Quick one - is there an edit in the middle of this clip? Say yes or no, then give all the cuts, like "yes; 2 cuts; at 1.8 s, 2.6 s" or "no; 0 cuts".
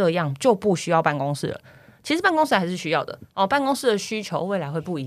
no; 0 cuts